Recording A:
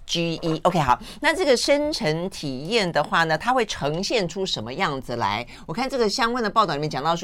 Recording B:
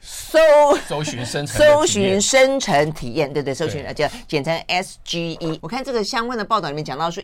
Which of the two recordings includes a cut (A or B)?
B